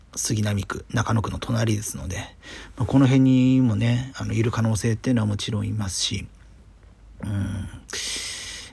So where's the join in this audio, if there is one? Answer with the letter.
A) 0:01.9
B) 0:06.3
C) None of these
C